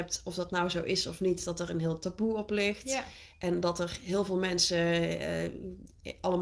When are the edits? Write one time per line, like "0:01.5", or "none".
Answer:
none

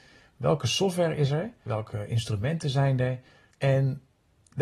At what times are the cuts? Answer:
0:01.7
0:03.5

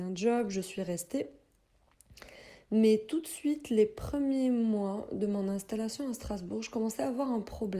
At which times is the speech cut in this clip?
none

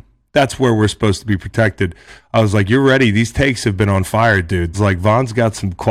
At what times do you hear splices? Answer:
0:02.2
0:04.7

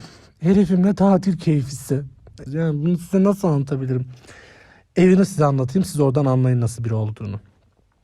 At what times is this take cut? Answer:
0:02.5

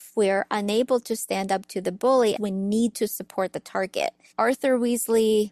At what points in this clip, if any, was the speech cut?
0:02.4
0:04.3

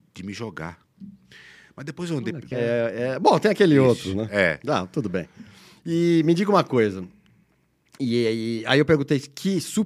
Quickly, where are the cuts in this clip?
0:02.5

